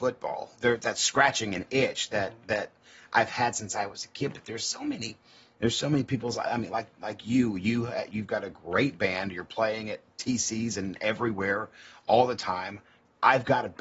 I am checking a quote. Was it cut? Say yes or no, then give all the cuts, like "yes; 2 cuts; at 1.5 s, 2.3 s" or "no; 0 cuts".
no; 0 cuts